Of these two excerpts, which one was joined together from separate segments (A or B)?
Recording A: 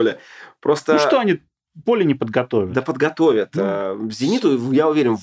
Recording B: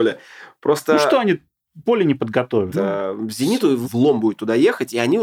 B